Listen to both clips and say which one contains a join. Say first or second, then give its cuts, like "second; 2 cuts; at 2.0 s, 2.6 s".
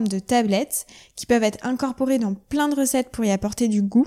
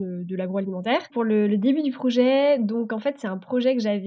second; 1 cut; at 1.1 s